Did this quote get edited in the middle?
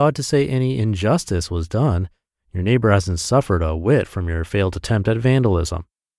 no; 0 cuts

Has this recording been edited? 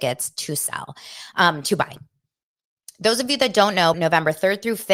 yes; 1 cut; at 3.9 s

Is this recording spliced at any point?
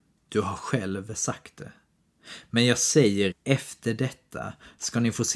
yes; 1 cut; at 3.3 s

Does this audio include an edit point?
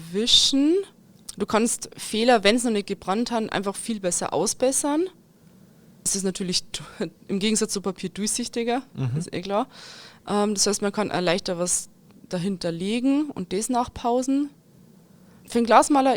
no; 0 cuts

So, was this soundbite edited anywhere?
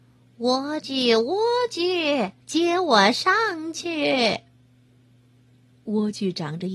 yes; 1 cut; at 2.4 s

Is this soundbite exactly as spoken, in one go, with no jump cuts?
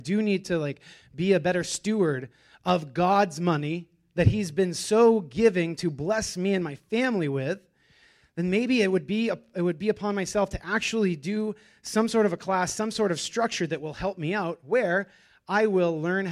yes; 0 cuts

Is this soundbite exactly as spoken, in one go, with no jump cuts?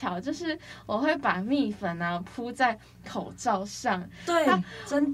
yes; 0 cuts

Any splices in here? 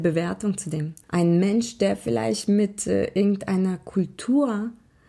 yes; 1 cut; at 1.0 s

